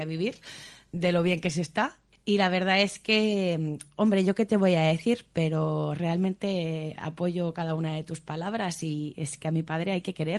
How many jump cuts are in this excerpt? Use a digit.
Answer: 1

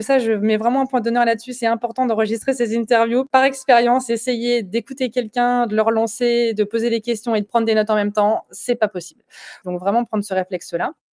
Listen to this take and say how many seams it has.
1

